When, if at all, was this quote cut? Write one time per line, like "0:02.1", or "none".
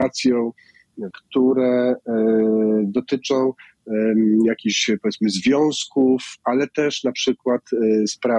0:01.1